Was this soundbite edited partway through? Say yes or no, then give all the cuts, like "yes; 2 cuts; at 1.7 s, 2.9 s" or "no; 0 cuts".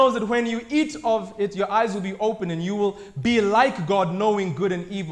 no; 0 cuts